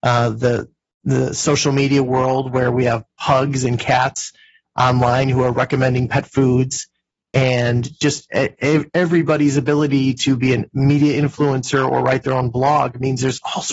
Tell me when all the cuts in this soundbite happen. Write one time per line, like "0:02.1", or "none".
none